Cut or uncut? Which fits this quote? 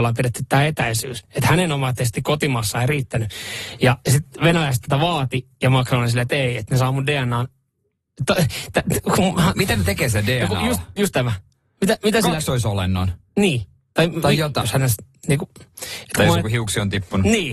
cut